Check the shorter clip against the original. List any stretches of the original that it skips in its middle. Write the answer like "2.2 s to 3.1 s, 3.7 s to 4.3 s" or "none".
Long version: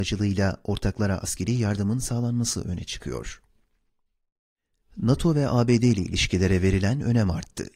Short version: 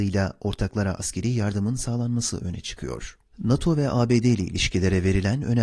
3.5 s to 4.8 s